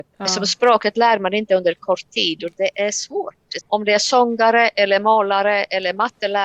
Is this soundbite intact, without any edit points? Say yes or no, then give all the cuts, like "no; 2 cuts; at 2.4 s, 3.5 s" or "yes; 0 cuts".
no; 1 cut; at 3.6 s